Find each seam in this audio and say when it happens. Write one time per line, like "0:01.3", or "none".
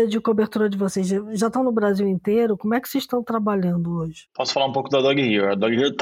none